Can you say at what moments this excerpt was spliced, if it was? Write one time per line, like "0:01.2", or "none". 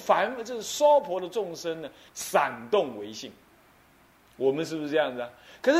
0:02.1